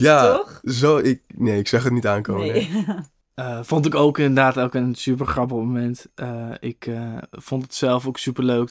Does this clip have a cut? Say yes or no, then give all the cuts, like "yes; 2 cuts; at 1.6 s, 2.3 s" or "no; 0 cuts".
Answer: no; 0 cuts